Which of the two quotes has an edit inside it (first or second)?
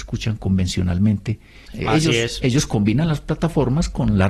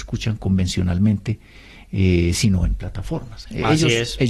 first